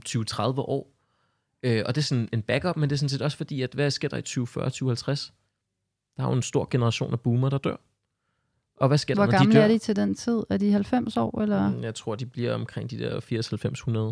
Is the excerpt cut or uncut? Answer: uncut